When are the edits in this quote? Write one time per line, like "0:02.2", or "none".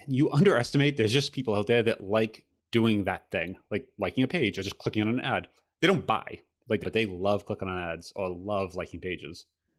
0:06.8